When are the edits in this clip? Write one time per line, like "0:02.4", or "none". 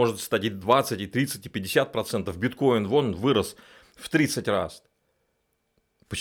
none